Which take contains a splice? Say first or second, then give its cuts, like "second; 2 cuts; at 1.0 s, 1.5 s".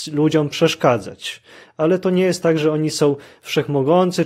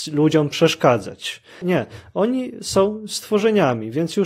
second; 1 cut; at 1.6 s